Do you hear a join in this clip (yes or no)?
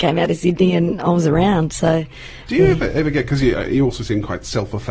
no